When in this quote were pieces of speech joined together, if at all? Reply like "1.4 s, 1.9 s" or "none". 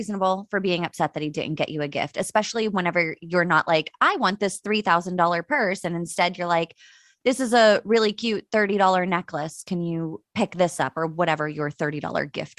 none